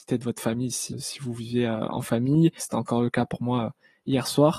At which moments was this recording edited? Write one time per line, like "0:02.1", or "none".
0:00.9
0:02.6